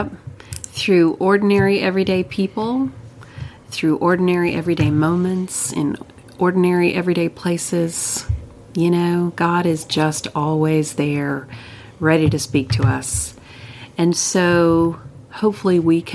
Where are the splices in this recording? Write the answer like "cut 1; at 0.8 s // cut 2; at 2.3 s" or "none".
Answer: none